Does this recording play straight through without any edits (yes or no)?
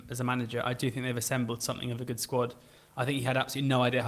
yes